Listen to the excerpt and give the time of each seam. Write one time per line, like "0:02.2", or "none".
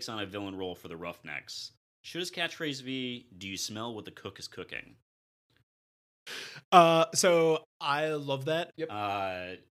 0:08.7